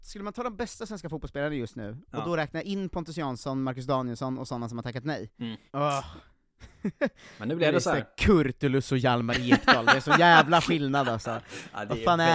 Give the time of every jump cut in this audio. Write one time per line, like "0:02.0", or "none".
0:05.7